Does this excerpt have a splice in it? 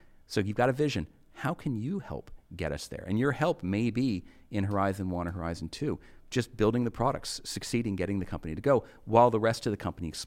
no; 0 cuts

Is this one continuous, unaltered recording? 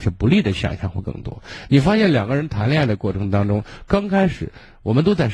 yes; 0 cuts

